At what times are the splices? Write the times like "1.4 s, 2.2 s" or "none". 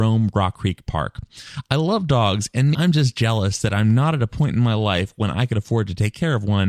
2.7 s